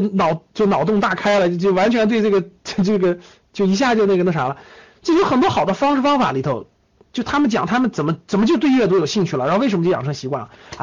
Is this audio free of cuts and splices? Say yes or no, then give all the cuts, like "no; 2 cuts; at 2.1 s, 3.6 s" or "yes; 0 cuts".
yes; 0 cuts